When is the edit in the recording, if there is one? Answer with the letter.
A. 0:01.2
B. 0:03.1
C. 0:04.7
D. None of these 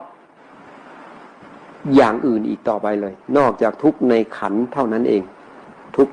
D